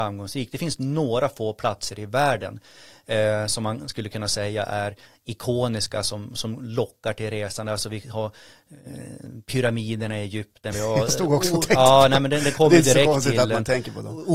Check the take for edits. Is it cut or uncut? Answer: uncut